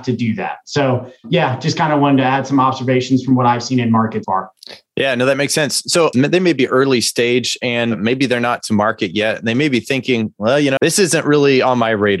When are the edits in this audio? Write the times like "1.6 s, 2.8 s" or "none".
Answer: 4.2 s, 6.1 s, 10.8 s